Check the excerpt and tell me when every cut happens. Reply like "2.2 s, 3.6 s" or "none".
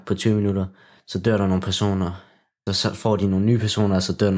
2.7 s